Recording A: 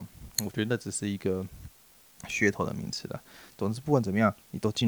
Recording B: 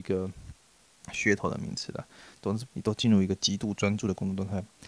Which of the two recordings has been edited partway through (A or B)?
B